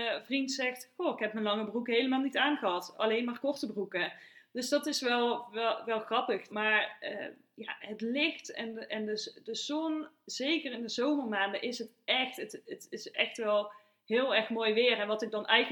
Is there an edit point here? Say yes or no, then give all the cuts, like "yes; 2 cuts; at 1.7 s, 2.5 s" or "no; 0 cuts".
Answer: yes; 1 cut; at 6.5 s